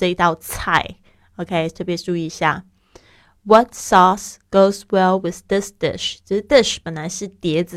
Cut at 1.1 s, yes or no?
no